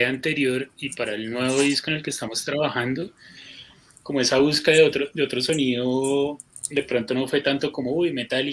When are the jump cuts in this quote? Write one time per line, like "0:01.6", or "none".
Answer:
0:04.0